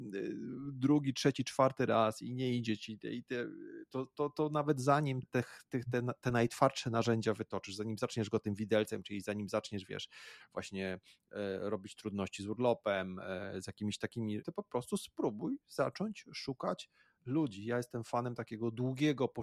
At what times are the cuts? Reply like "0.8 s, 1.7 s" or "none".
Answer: 5.2 s, 14.4 s